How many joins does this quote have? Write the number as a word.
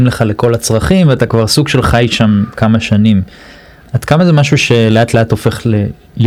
one